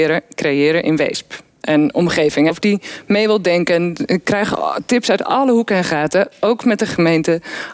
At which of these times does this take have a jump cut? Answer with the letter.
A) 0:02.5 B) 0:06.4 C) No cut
A